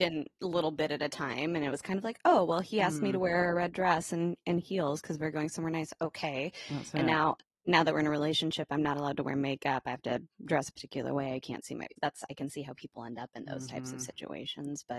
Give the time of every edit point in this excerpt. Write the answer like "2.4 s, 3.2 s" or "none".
none